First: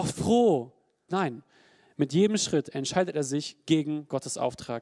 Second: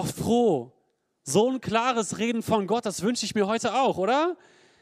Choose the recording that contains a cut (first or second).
first